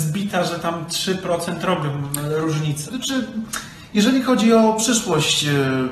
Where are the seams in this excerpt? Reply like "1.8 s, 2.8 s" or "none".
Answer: 2.9 s